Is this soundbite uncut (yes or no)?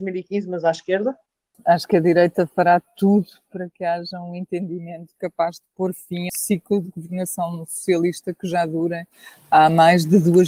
no